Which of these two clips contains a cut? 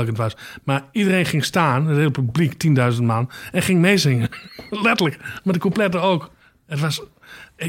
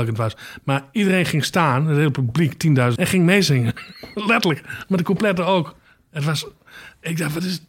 second; 1 cut; at 3.0 s

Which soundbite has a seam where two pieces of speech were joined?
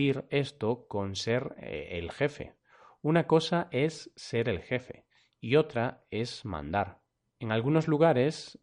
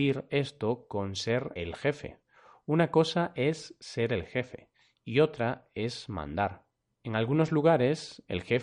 second; 1 cut; at 1.6 s

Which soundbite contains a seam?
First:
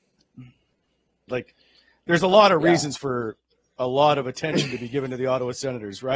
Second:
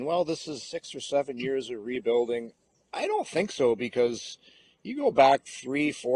first; 1 cut; at 1.3 s

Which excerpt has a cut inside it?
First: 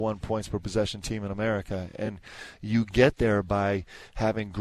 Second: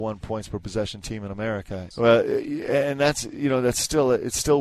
second; 1 cut; at 1.9 s

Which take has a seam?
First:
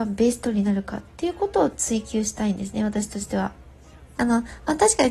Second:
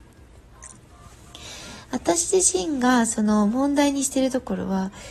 first; 1 cut; at 4.1 s

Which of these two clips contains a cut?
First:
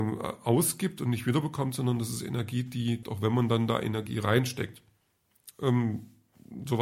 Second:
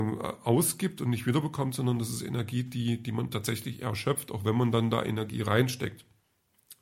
first; 2 cuts; at 3.0 s, 5.5 s

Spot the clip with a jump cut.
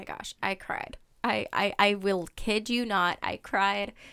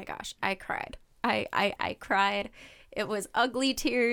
second; 1 cut; at 1.8 s

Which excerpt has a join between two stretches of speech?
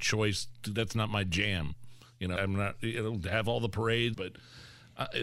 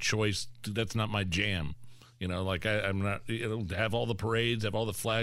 first; 2 cuts; at 2.4 s, 4.1 s

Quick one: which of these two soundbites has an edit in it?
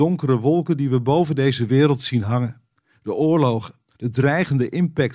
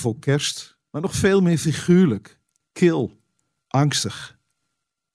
first; 1 cut; at 3.9 s

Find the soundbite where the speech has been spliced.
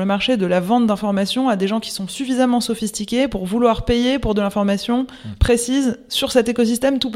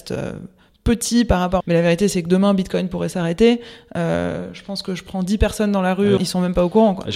second; 2 cuts; at 1.6 s, 6.2 s

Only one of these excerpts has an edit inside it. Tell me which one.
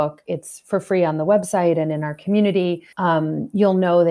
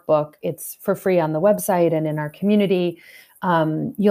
first; 1 cut; at 2.9 s

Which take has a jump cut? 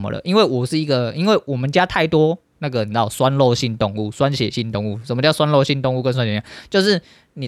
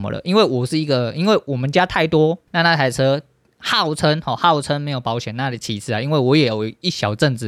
second; 1 cut; at 2.5 s

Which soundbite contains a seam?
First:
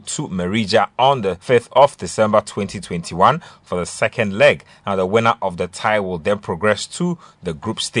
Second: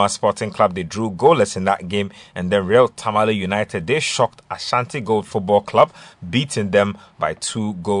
first; 1 cut; at 1.4 s

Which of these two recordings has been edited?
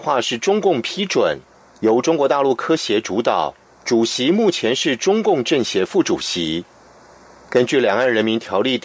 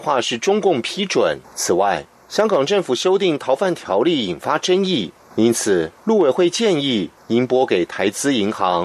second; 3 cuts; at 1.4 s, 5.3 s, 7.2 s

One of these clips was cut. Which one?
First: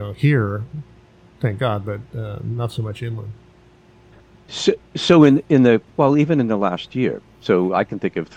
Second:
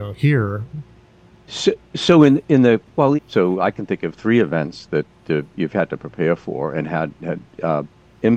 second; 2 cuts; at 1.3 s, 3.2 s

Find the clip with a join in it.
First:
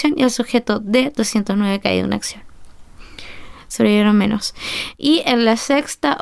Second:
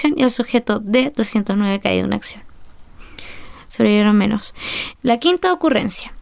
second; 1 cut; at 5.0 s

